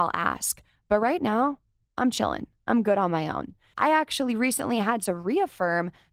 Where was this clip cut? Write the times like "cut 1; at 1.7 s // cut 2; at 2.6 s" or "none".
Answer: cut 1; at 3.7 s